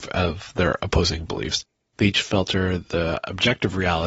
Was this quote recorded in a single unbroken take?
no; 1 cut; at 1.8 s

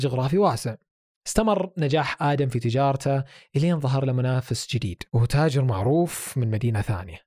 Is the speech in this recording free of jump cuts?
no; 1 cut; at 5.1 s

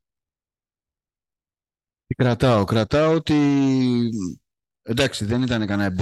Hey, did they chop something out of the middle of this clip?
no; 0 cuts

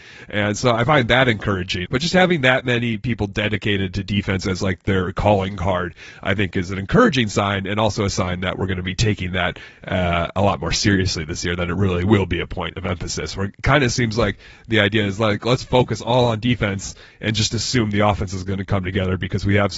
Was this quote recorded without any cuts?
no; 1 cut; at 1.9 s

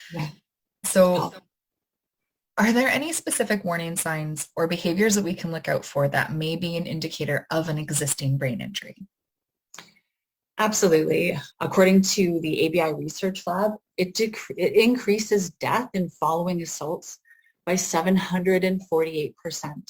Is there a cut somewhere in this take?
yes; 1 cut; at 11.5 s

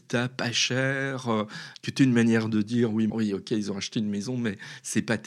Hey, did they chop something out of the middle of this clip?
yes; 2 cuts; at 1.7 s, 3.1 s

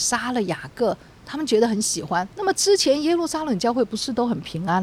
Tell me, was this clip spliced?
yes; 1 cut; at 2.3 s

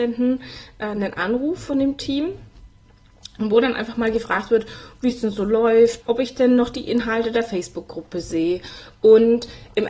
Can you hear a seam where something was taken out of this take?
yes; 1 cut; at 6.0 s

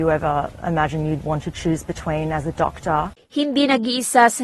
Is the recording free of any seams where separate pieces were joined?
yes; 0 cuts

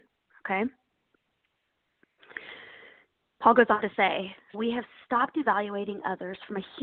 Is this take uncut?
no; 1 cut; at 4.5 s

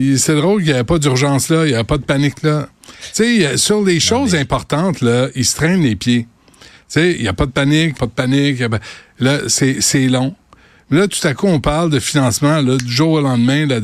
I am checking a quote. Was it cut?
yes; 1 cut; at 7.9 s

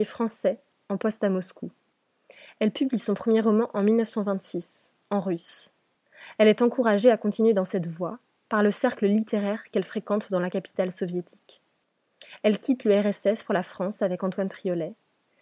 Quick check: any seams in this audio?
no; 0 cuts

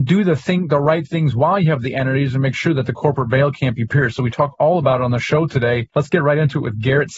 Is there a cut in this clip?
yes; 1 cut; at 5.9 s

